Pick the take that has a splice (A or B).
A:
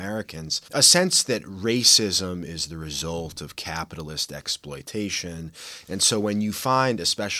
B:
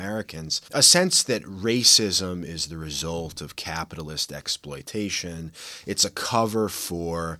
A